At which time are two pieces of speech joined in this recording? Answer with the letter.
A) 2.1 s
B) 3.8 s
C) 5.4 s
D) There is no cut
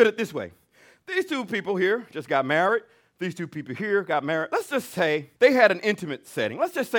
C